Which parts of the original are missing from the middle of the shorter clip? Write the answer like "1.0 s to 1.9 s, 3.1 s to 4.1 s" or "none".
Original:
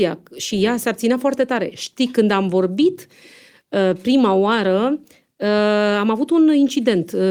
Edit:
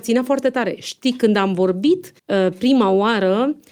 3.1 s to 3.6 s